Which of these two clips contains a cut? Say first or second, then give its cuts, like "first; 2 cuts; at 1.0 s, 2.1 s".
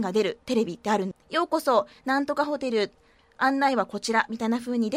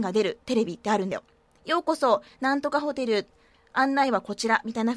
first; 1 cut; at 1.1 s